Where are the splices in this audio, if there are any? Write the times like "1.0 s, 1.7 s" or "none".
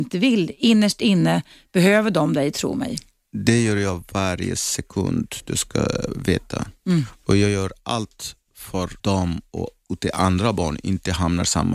9.0 s

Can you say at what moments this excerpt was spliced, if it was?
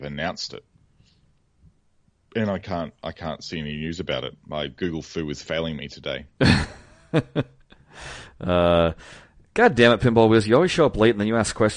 none

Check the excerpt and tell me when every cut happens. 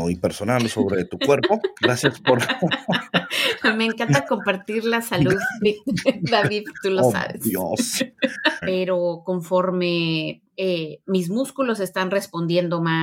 8.6 s, 10.5 s

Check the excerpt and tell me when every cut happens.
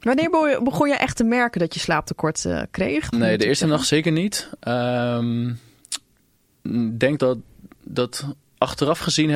3.1 s, 7.2 s

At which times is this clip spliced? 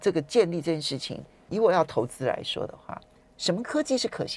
1.5 s

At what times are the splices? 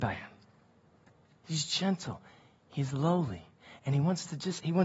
none

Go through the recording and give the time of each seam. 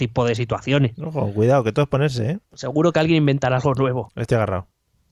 2.4 s, 4.1 s

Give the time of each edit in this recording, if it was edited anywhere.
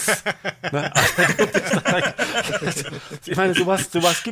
none

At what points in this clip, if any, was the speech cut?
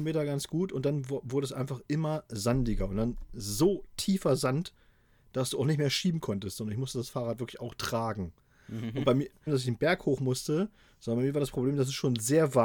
9.5 s

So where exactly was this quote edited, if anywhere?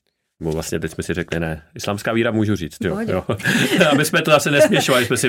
2.8 s

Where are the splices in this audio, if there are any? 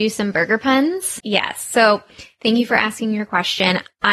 1.2 s

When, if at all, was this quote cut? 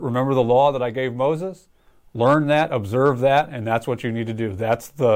none

